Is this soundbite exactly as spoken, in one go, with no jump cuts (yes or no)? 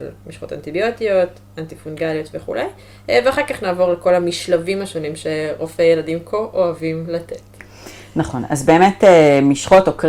yes